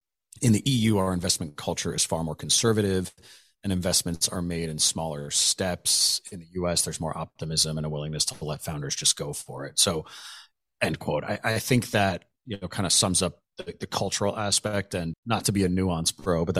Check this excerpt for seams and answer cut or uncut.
cut